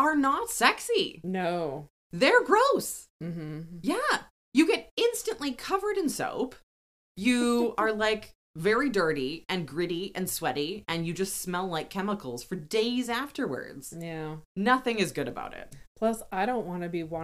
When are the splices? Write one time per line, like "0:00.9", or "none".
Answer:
none